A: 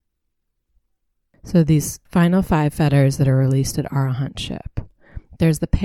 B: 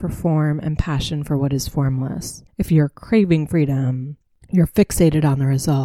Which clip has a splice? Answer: B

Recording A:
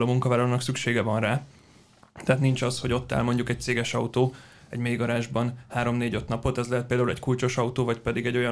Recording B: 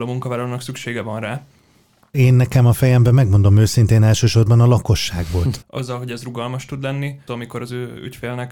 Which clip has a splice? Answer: B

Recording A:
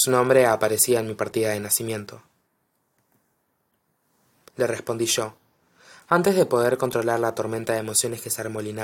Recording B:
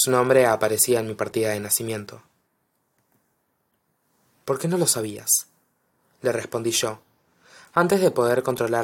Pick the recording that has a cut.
A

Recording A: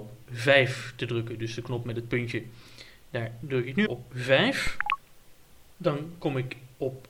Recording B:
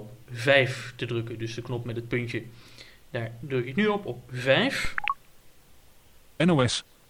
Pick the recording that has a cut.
A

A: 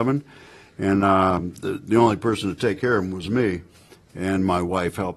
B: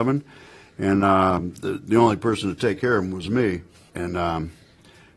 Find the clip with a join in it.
B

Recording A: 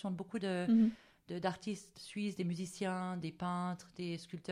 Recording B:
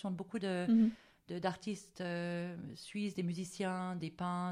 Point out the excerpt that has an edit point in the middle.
A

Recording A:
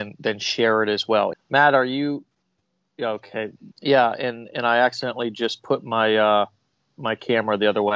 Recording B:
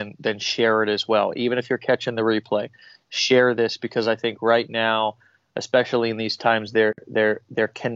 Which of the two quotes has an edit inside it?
A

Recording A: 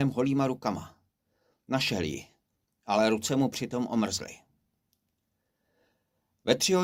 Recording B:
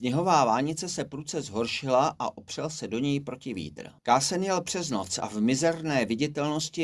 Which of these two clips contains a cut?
B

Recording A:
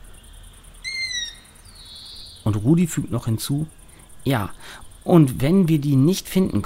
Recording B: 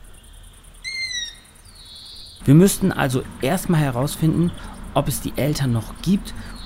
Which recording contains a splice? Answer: B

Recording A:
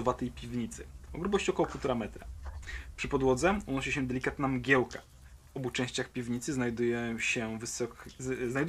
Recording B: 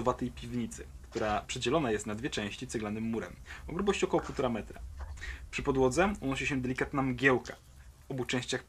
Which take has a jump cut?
A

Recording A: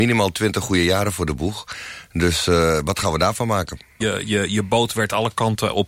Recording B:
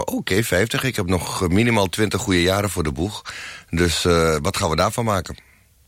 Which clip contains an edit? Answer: A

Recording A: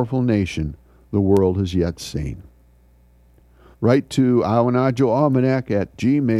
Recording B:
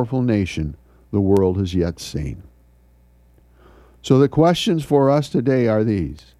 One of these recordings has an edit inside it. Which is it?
A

